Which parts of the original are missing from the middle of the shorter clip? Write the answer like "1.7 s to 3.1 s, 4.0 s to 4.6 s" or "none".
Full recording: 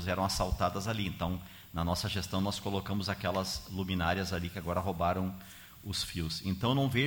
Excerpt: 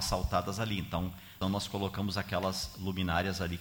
1.7 s to 2.3 s